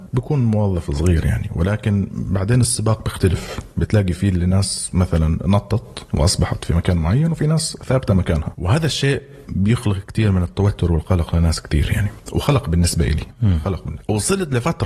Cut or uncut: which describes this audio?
uncut